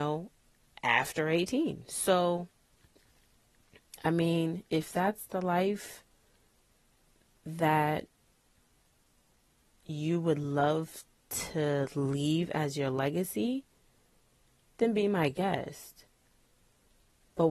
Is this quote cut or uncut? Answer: uncut